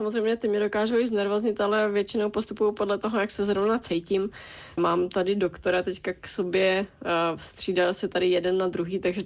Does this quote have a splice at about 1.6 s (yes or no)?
no